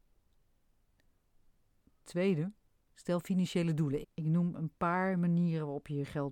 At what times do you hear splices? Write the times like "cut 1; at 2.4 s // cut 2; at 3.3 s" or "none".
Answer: cut 1; at 4.0 s